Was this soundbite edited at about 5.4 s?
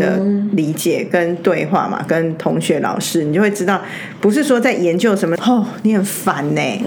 yes; 1 cut; at 5.4 s

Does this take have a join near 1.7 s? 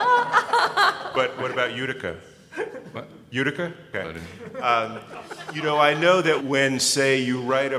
no; 2 cuts; at 3.9 s, 6.4 s

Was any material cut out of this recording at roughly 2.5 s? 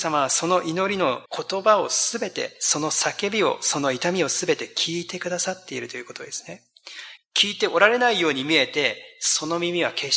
no; 2 cuts; at 1.3 s, 7.2 s

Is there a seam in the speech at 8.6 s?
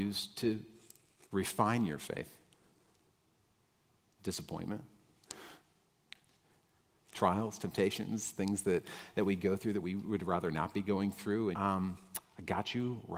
no; 1 cut; at 11.5 s

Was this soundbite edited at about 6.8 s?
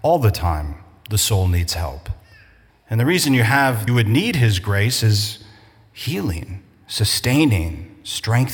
no; 2 cuts; at 2.7 s, 3.9 s

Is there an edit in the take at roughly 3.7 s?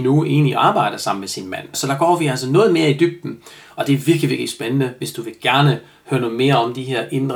no; 1 cut; at 1.7 s

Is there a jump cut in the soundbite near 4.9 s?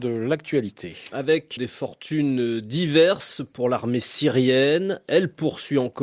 no; 1 cut; at 1.6 s

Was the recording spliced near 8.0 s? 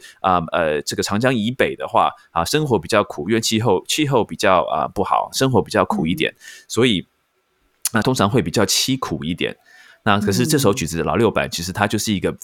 yes; 1 cut; at 8.0 s

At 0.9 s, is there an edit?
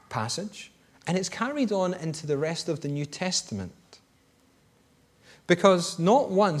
yes; 1 cut; at 0.9 s

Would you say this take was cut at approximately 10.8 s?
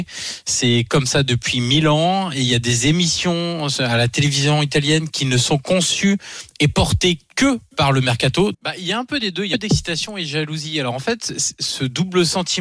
no; 1 cut; at 8.5 s

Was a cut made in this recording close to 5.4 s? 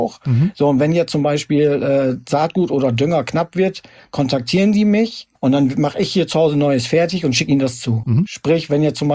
yes; 2 cuts; at 5.4 s, 8.0 s

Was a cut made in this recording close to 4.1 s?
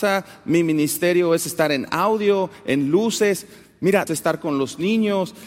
yes; 1 cut; at 4.1 s

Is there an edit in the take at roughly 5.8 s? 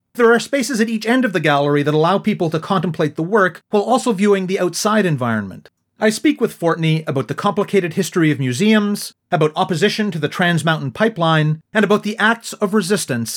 yes; 1 cut; at 5.8 s

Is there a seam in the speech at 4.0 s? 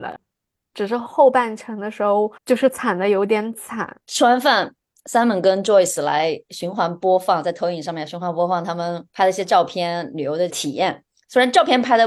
yes; 3 cuts; at 2.4 s, 4.0 s, 10.5 s

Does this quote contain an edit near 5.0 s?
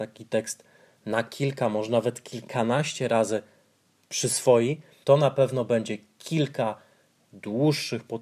yes; 1 cut; at 5.0 s

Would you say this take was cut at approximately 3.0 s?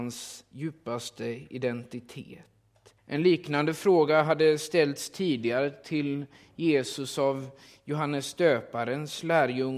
yes; 1 cut; at 3.0 s

